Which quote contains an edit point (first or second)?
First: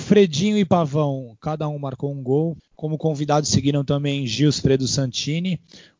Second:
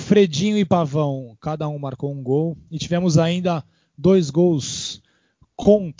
first